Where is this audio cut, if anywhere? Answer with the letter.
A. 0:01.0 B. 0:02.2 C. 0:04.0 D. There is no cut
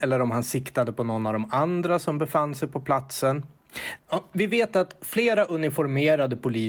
C